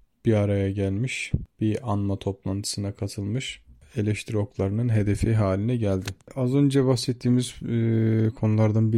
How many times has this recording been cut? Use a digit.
0